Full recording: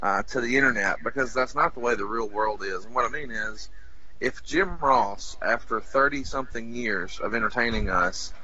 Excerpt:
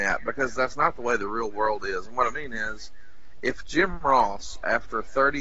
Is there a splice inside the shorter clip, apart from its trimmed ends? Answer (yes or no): no